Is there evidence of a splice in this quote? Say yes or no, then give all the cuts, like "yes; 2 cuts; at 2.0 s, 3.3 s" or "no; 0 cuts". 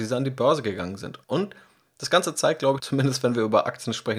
yes; 2 cuts; at 1.2 s, 2.8 s